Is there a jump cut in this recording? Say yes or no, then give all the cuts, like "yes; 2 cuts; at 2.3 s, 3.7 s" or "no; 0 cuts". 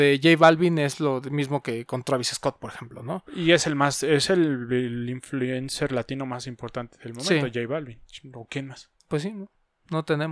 yes; 1 cut; at 9.0 s